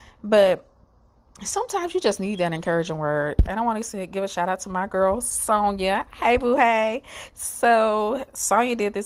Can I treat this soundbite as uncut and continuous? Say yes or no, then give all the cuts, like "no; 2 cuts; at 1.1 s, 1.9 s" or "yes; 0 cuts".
yes; 0 cuts